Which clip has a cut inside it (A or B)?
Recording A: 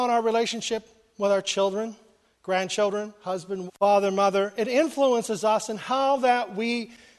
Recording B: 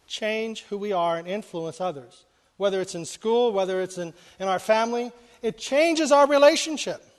A